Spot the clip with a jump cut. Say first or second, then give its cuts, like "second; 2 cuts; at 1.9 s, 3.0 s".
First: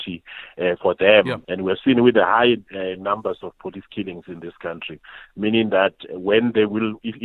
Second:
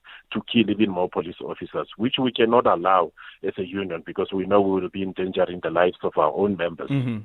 first; 1 cut; at 1.4 s